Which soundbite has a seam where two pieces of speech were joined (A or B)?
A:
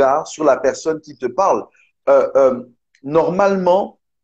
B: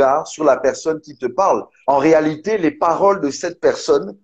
B